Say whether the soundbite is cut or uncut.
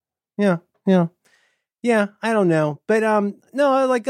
uncut